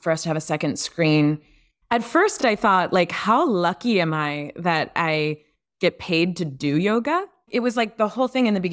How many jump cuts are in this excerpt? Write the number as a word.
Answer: zero